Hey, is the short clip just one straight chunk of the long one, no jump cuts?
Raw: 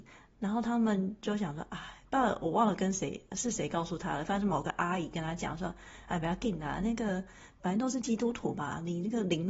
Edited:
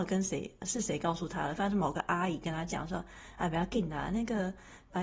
yes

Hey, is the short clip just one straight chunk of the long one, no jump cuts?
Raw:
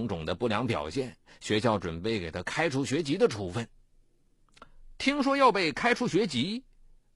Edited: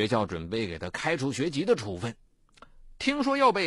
no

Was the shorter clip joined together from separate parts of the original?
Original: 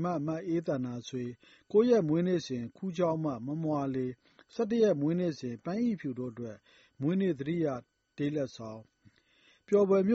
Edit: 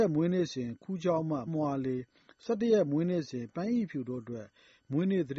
yes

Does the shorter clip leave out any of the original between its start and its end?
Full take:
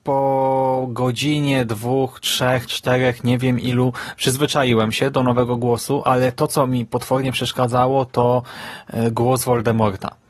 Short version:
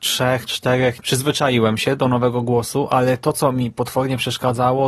yes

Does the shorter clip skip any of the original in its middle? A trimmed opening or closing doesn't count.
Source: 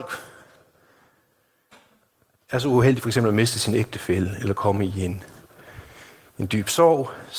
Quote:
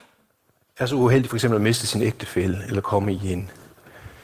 no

